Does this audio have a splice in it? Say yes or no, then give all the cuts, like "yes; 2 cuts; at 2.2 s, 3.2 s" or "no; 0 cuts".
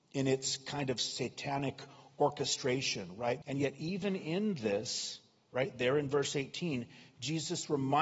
yes; 1 cut; at 3.4 s